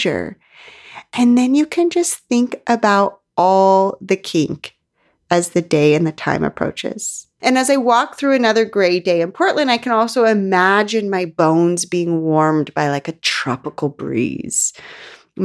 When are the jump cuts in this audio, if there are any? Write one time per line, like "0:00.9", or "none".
0:07.4